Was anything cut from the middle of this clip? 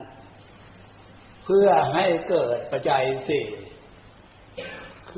yes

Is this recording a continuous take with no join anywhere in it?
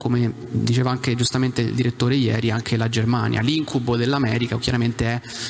yes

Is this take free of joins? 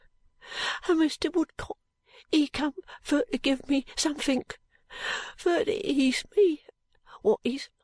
yes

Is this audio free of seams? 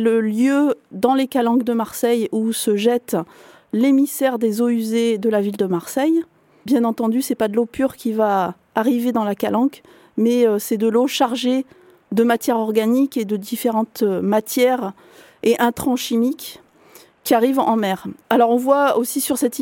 yes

